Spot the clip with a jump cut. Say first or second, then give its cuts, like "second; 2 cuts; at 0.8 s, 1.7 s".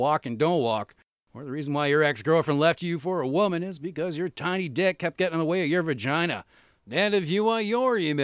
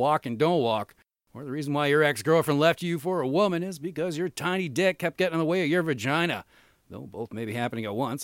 first; 1 cut; at 6.8 s